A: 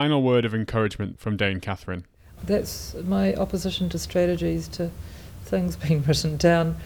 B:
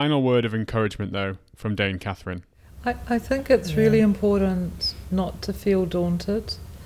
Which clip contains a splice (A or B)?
A